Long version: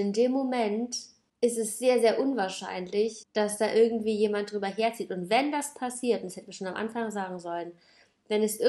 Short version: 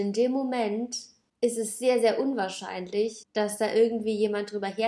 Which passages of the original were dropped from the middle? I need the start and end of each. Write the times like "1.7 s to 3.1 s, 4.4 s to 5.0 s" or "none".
none